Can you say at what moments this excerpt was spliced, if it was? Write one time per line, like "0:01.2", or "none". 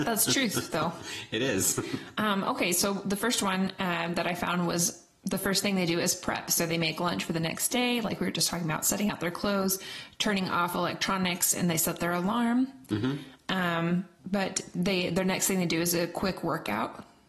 0:14.2